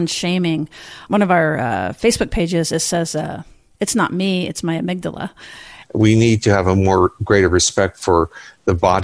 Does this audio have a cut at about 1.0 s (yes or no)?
no